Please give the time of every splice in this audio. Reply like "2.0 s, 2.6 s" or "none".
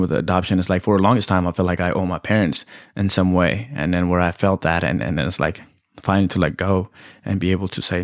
none